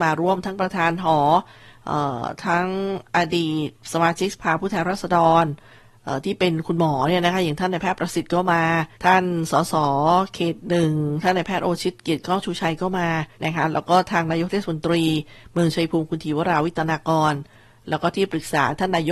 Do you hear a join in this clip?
yes; 2 cuts; at 8.9 s, 13.3 s

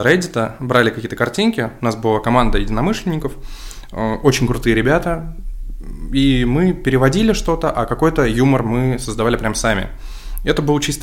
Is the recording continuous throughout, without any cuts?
yes; 0 cuts

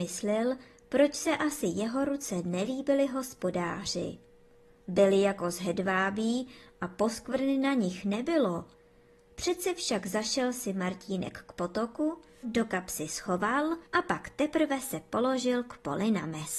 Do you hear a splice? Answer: yes; 2 cuts; at 12.4 s, 13.9 s

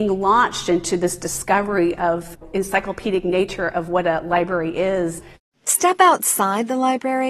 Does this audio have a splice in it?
no; 0 cuts

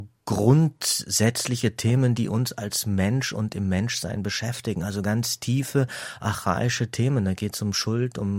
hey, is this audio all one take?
yes; 0 cuts

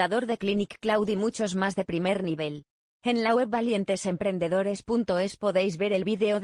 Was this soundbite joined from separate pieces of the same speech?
no; 0 cuts

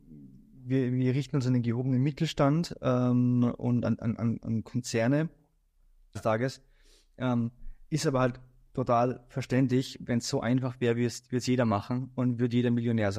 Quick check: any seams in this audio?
yes; 1 cut; at 6.2 s

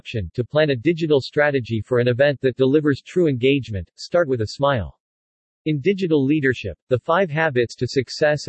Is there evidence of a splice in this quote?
yes; 1 cut; at 5.6 s

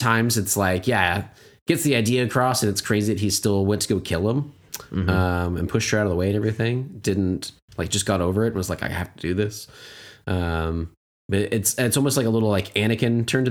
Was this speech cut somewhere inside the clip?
no; 0 cuts

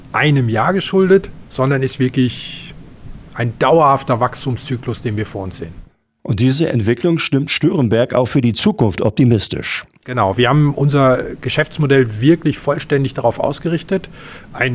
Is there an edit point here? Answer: no; 0 cuts

